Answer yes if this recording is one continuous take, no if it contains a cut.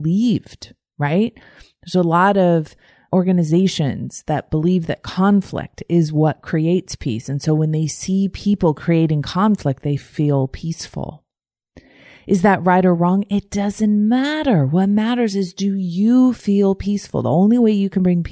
yes